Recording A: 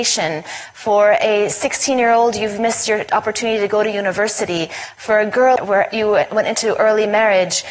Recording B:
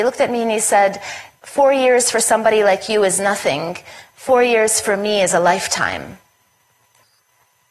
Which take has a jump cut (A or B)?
A